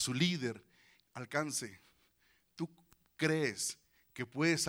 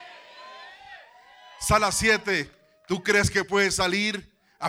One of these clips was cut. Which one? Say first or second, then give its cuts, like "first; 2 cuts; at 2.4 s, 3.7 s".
first; 1 cut; at 1.0 s